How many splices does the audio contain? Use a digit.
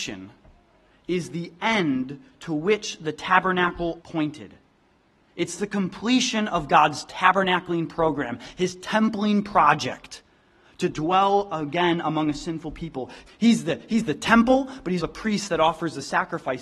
3